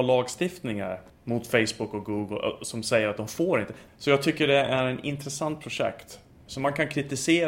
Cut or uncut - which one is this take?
cut